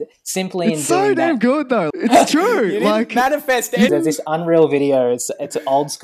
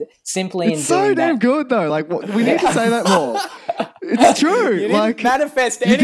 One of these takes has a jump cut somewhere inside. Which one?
first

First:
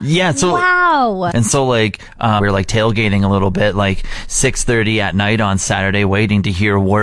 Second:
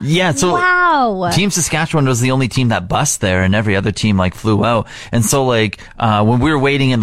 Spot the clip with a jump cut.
first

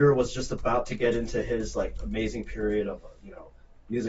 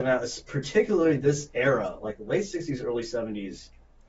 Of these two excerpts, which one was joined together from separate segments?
first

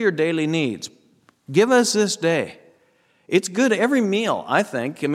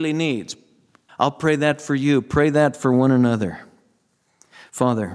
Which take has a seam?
second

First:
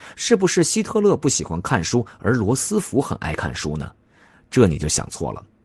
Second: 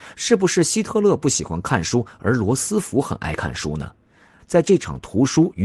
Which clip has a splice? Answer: second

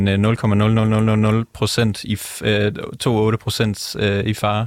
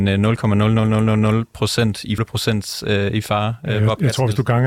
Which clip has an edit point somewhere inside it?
second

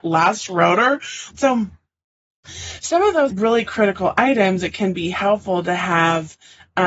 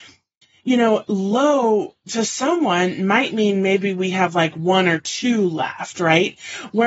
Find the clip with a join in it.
first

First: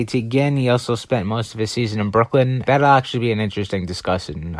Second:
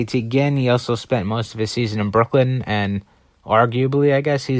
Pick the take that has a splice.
first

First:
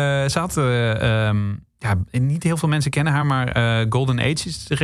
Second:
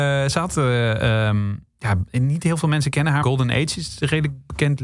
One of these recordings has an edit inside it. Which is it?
second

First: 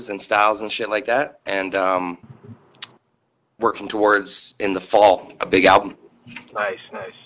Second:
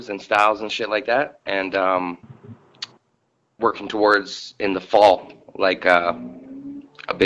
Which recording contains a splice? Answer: first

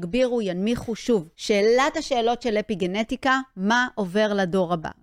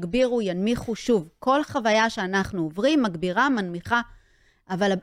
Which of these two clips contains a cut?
first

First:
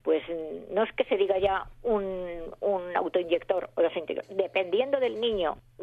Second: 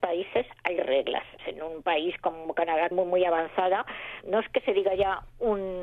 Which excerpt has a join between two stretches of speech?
second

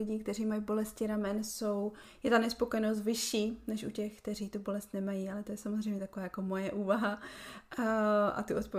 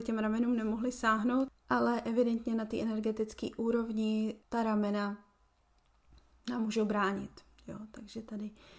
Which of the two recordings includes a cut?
second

